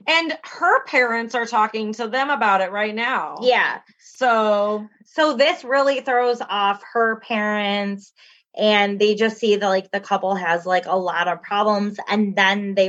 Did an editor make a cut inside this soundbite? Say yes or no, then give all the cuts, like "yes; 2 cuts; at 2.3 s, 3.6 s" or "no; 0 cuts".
no; 0 cuts